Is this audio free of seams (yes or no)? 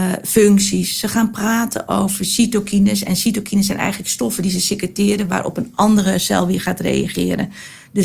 yes